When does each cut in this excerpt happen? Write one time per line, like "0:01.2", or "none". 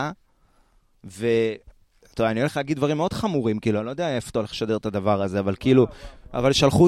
none